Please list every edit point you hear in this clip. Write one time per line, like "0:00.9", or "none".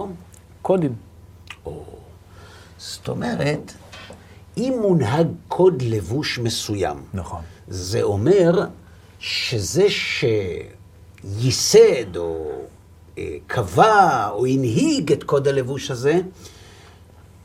none